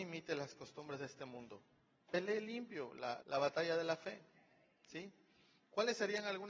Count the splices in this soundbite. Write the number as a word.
one